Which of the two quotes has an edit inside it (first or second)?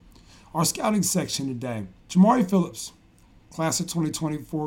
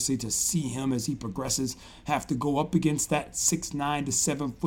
first